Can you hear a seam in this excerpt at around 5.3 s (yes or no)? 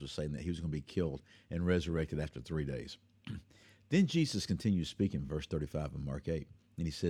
no